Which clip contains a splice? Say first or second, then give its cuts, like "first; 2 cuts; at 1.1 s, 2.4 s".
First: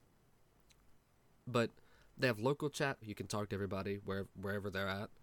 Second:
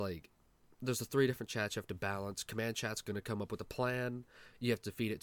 first; 1 cut; at 3.0 s